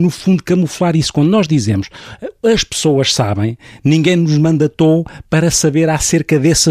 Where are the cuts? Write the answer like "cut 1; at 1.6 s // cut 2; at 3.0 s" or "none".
none